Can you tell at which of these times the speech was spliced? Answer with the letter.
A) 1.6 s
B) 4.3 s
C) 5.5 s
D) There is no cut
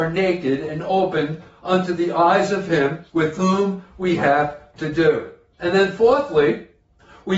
C